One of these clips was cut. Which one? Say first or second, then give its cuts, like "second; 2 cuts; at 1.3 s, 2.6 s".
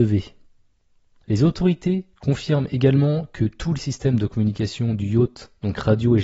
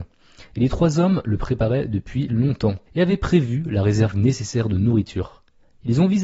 second; 1 cut; at 2.9 s